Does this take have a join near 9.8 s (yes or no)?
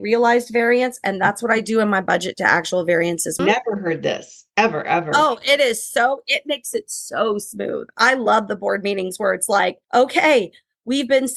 yes